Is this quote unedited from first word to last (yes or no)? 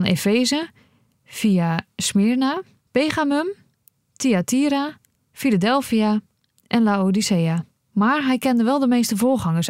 no